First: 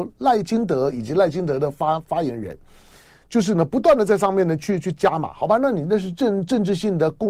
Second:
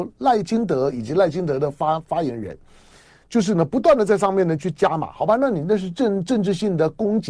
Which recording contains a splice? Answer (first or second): second